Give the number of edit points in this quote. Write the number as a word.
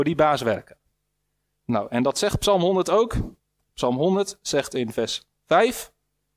one